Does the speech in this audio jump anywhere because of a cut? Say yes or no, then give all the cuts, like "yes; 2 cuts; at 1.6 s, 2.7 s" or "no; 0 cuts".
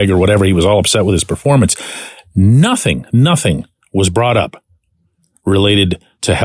yes; 1 cut; at 3.1 s